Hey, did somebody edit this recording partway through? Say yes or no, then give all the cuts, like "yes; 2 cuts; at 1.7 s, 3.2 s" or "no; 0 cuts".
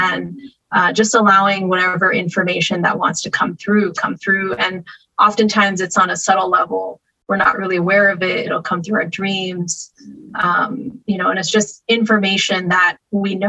no; 0 cuts